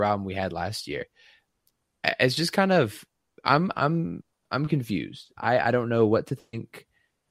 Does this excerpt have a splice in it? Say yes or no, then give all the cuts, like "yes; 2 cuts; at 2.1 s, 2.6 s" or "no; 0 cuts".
no; 0 cuts